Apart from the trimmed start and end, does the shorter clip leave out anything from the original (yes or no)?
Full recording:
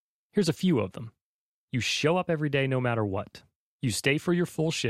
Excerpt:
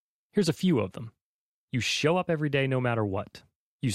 no